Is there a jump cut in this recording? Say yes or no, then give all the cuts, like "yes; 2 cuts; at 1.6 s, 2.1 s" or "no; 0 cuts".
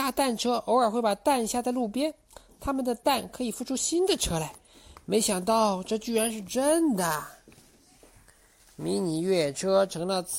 no; 0 cuts